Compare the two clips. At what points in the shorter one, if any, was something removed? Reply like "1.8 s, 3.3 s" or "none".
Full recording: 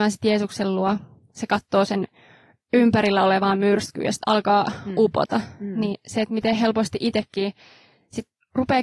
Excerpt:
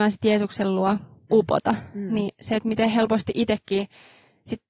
1.3 s